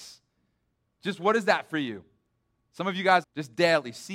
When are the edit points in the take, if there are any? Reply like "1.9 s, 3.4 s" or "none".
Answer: 3.2 s